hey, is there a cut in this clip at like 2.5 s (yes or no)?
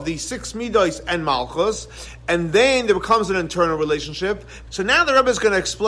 no